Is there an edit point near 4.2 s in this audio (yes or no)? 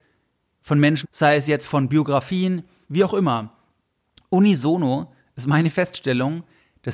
no